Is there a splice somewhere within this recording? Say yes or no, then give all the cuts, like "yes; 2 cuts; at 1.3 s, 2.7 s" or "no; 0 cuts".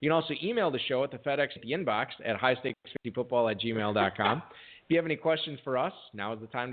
yes; 1 cut; at 1.6 s